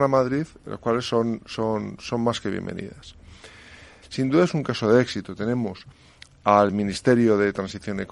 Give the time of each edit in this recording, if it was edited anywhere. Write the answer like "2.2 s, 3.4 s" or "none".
4.0 s